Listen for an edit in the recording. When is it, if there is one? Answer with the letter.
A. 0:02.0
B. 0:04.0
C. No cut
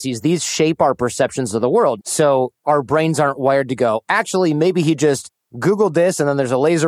A